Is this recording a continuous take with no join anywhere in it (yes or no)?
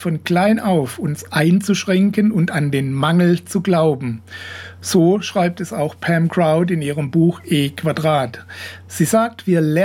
yes